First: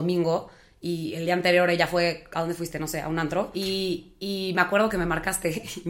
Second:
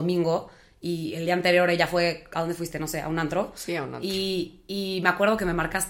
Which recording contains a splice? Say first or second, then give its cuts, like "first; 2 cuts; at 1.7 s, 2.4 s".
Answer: first; 1 cut; at 3.5 s